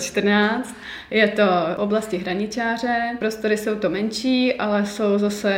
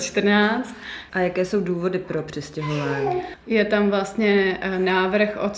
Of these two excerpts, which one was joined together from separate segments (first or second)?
second